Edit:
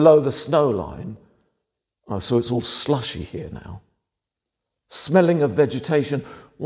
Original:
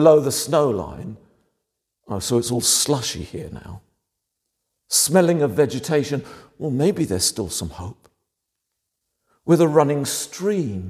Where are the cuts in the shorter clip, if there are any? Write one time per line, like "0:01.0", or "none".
none